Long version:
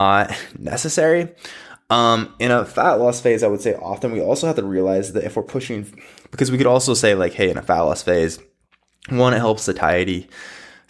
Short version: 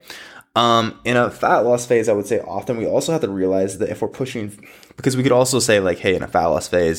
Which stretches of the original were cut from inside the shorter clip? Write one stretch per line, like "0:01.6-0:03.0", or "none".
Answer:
none

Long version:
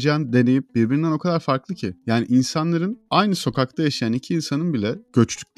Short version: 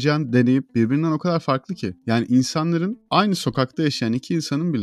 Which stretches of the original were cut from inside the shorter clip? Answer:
none

